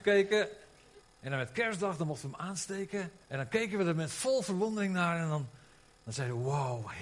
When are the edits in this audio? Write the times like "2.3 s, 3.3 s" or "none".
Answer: 1.0 s, 3.2 s